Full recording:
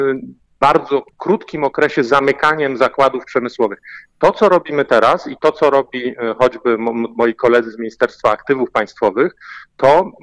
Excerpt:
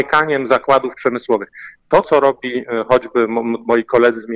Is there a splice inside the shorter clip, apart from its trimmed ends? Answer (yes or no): yes